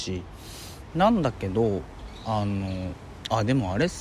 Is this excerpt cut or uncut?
cut